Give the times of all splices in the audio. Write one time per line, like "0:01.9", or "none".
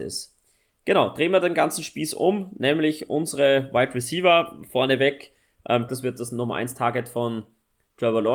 0:05.9